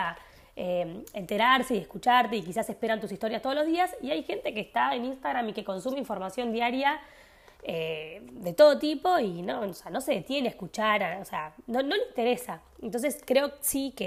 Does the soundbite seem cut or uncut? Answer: uncut